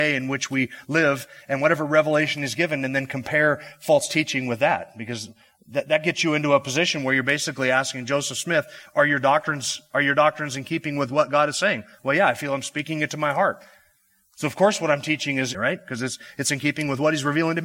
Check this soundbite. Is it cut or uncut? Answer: cut